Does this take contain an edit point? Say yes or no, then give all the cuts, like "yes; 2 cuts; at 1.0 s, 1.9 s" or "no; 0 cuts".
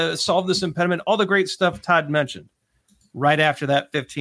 no; 0 cuts